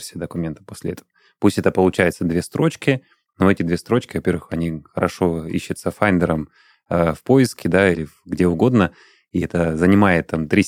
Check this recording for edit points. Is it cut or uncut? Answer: cut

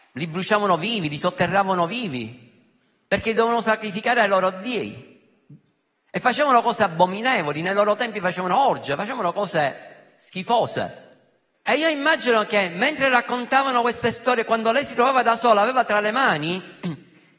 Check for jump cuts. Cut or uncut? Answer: cut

